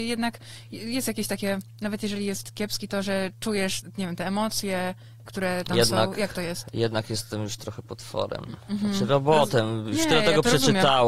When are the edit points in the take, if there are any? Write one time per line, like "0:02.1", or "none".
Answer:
none